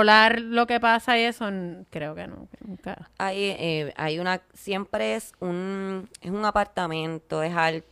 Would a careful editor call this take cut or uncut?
cut